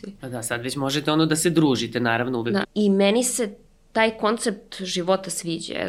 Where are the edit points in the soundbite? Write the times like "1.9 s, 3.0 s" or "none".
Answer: 2.6 s